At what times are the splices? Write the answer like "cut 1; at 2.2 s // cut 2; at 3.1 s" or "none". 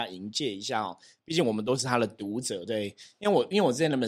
none